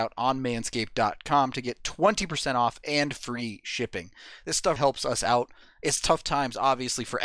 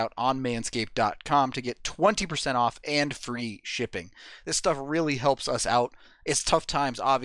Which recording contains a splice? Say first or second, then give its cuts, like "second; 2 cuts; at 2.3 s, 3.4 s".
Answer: first; 1 cut; at 4.8 s